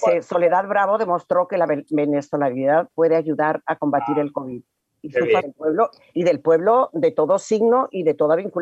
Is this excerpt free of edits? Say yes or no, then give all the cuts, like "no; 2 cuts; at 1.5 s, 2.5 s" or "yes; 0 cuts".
no; 1 cut; at 5.4 s